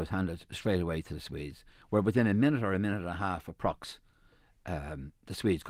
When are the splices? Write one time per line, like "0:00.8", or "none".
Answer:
none